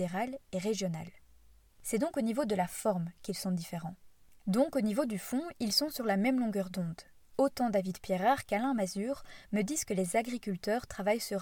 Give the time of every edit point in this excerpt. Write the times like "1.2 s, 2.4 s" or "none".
1.7 s, 4.4 s